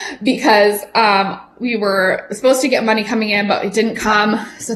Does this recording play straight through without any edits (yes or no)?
yes